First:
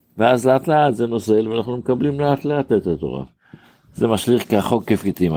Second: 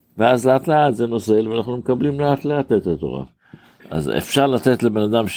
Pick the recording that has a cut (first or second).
second